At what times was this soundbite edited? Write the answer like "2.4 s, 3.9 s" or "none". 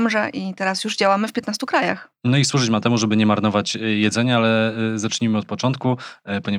none